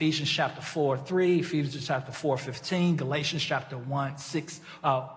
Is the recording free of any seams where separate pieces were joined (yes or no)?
yes